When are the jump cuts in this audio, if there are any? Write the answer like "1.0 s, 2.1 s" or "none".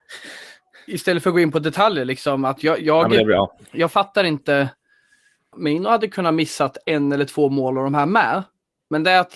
3.6 s, 5.5 s